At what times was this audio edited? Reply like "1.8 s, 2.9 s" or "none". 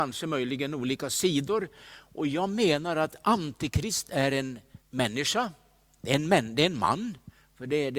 4.8 s